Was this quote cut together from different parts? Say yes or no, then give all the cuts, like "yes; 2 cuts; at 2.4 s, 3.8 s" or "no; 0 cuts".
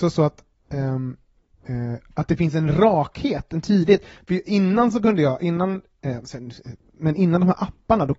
no; 0 cuts